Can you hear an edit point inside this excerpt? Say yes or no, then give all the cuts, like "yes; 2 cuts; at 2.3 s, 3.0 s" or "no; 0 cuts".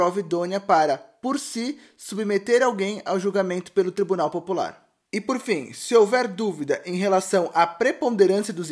yes; 1 cut; at 5.1 s